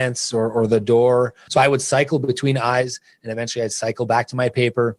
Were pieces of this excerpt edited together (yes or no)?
yes